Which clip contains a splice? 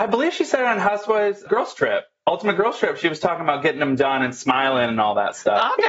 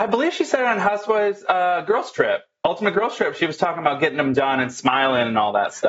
first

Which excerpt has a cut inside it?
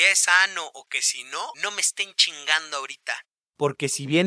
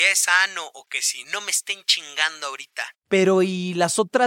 second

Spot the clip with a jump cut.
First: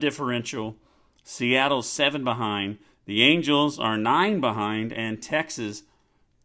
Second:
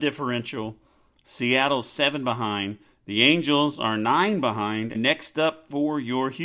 second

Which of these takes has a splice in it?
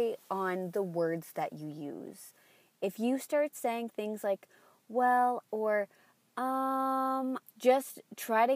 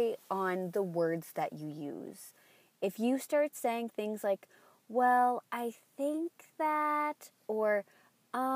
first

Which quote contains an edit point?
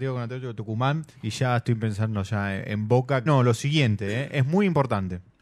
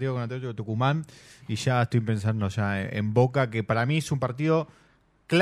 first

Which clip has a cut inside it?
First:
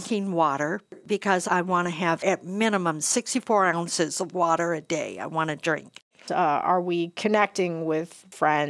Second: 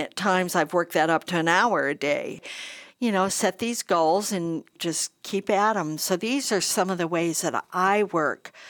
first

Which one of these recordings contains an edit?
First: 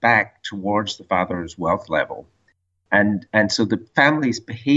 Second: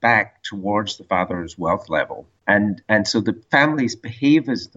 second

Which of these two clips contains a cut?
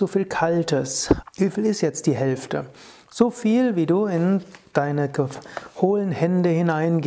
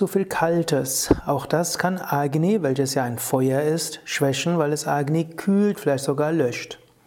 first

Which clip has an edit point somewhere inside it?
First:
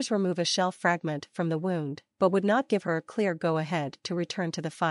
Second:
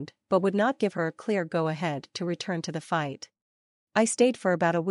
second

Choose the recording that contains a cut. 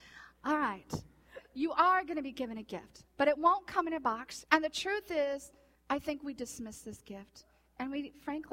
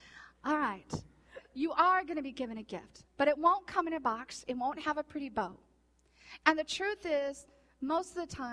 first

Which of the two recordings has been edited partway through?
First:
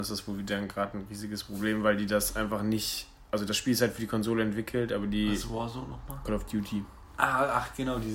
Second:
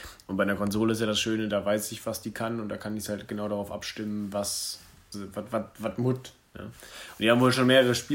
second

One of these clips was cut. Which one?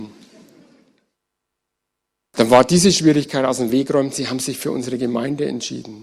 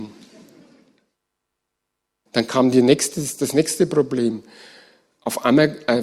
second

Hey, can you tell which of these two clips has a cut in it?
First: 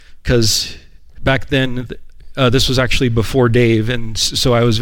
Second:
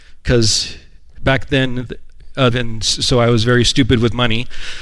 second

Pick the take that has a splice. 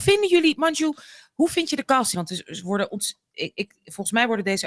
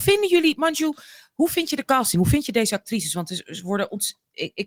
first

